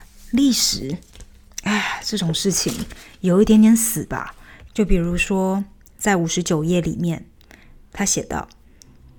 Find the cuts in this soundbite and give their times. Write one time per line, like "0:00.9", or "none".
0:04.7